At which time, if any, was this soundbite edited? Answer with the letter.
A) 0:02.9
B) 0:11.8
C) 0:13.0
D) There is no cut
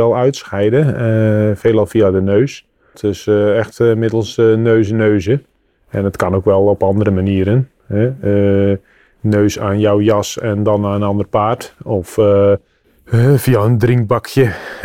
A